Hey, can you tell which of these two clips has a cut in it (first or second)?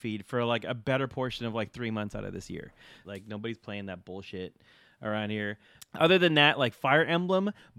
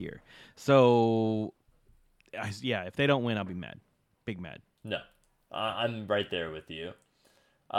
first